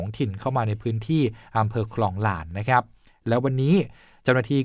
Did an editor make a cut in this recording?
no; 0 cuts

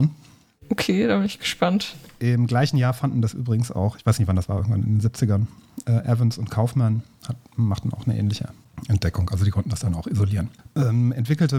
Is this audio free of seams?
yes; 0 cuts

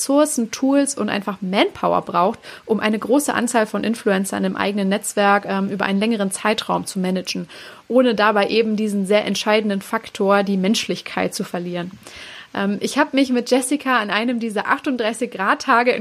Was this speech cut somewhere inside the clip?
no; 0 cuts

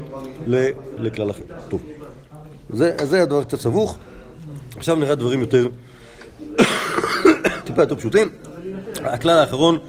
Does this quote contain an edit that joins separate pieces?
yes; 1 cut; at 1.0 s

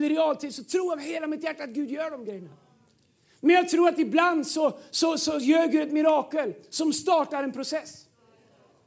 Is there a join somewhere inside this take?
no; 0 cuts

